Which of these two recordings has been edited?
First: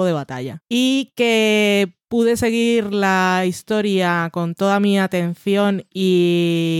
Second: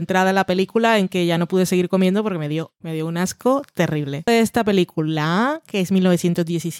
second; 1 cut; at 4.3 s

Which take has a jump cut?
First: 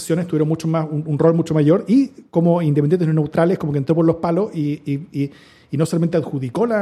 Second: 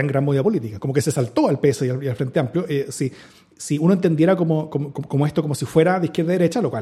second; 1 cut; at 4.9 s

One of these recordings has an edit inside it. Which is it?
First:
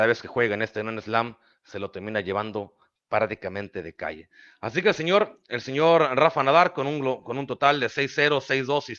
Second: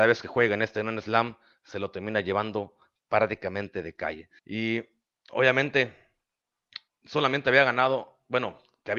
second; 2 cuts; at 4.4 s, 6.9 s

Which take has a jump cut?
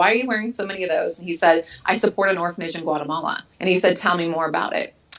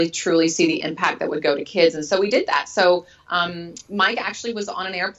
first; 1 cut; at 3.5 s

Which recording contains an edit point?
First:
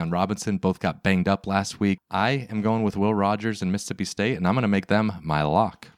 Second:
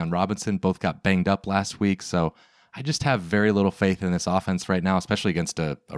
first; 1 cut; at 2.0 s

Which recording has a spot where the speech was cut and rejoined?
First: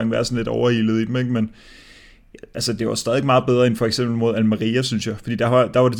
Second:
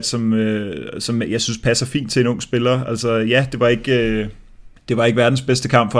second; 1 cut; at 4.8 s

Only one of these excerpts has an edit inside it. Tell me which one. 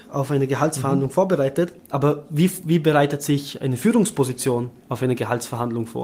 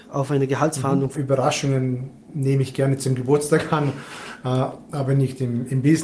second; 1 cut; at 1.1 s

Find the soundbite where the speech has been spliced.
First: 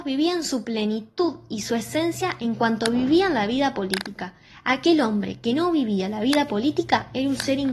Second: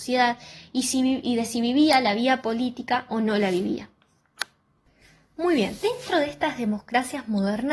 second; 1 cut; at 5.8 s

